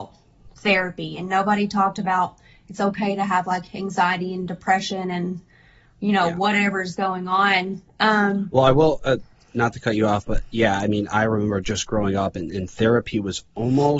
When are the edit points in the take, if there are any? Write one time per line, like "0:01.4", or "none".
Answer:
0:11.6